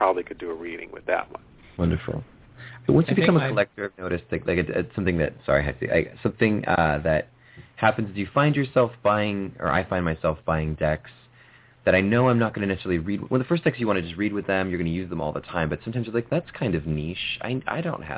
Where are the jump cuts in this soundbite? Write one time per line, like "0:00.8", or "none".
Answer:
0:16.3